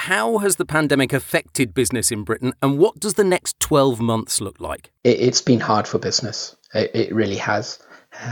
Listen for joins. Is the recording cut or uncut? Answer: cut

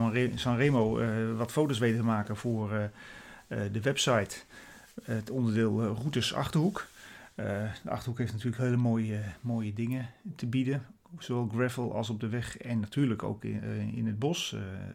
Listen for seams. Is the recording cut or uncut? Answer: uncut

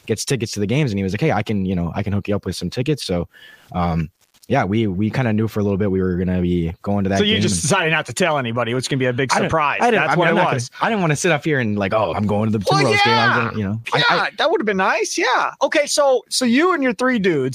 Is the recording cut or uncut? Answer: cut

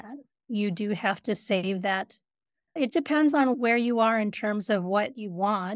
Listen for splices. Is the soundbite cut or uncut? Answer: cut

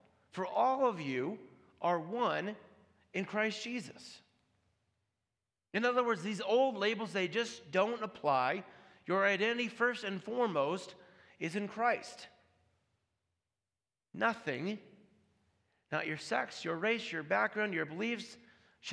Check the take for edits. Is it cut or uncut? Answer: uncut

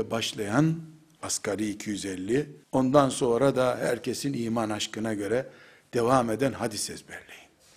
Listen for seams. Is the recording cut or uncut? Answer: cut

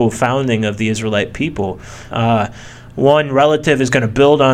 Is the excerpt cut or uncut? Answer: cut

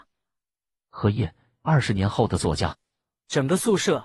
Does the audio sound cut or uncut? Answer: uncut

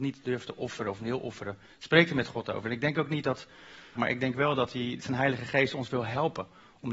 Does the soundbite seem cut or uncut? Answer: cut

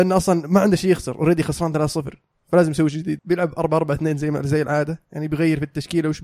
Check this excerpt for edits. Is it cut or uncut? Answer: cut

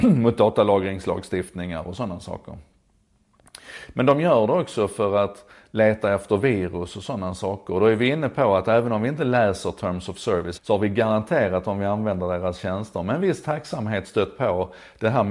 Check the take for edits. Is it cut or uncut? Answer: cut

